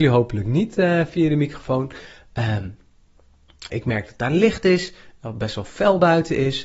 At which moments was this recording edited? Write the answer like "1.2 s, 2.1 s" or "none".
3.7 s